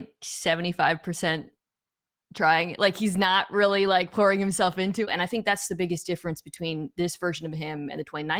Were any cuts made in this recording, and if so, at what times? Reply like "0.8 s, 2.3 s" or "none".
5.1 s

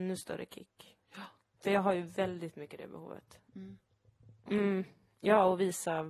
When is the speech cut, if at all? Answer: 4.5 s

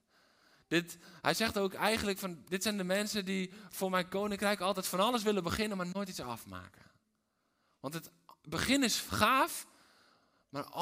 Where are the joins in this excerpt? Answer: none

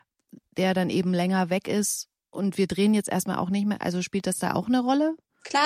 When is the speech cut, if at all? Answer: none

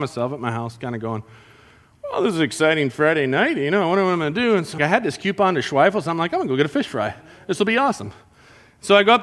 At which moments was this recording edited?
4.8 s

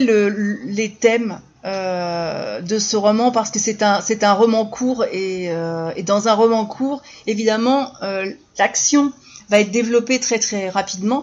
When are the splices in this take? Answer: none

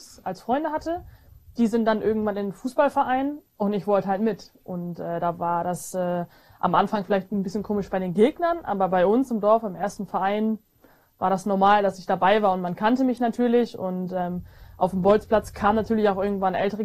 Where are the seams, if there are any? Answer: none

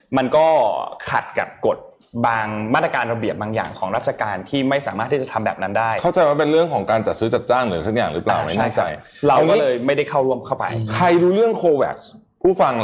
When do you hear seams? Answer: none

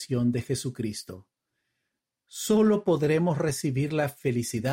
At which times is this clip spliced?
none

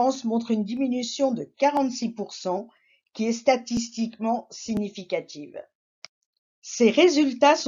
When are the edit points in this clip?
none

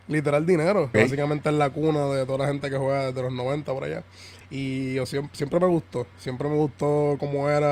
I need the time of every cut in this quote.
0.9 s, 4.4 s

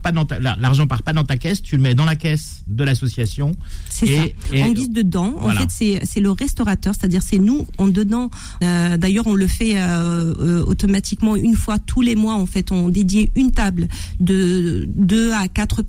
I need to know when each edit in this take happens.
8.6 s

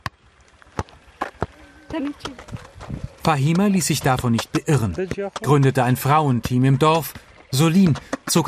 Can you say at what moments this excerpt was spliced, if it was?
none

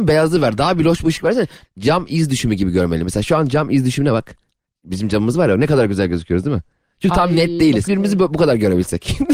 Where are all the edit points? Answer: 1.7 s, 7.9 s

